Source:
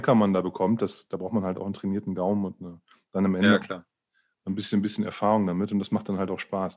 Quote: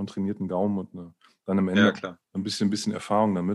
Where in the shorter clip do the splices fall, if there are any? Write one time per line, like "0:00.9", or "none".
0:02.2

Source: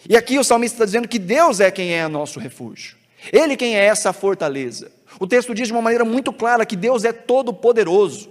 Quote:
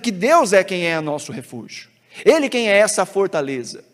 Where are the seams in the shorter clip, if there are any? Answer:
none

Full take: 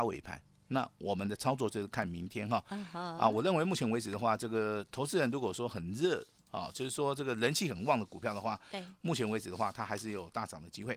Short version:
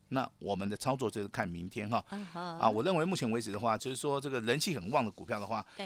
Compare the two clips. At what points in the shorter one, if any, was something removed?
0:03.8

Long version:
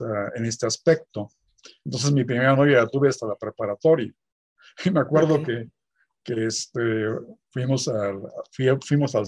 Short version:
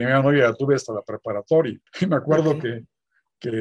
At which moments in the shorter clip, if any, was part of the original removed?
0:01.9

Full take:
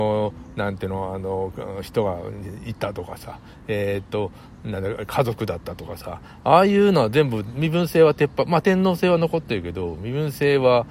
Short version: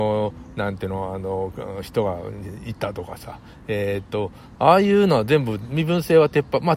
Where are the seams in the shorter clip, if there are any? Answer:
0:04.6

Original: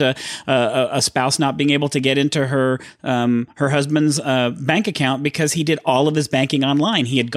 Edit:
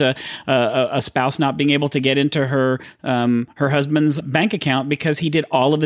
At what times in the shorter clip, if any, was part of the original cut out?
0:04.2

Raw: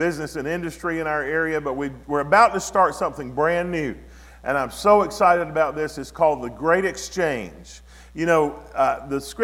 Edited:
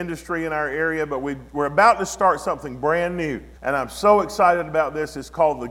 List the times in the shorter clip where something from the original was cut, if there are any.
0:03.6

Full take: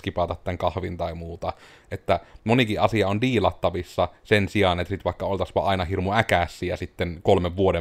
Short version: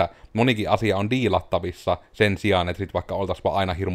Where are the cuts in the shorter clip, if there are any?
none

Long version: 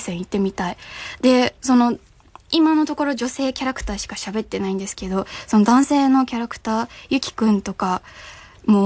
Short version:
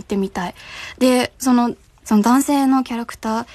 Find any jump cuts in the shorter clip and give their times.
0:02.0

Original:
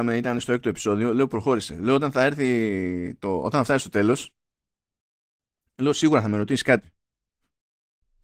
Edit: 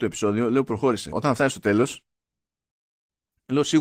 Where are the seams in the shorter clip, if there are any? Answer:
0:01.1

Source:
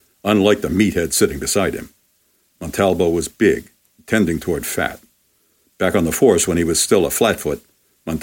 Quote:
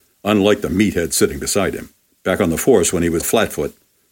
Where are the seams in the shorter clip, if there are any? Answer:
0:02.1
0:03.2

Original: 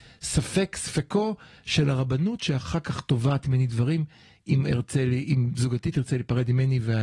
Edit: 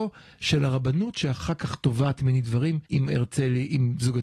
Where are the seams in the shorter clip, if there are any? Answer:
0:02.8

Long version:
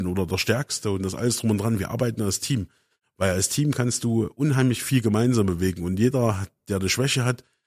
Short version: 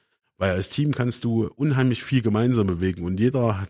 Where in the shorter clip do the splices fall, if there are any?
none

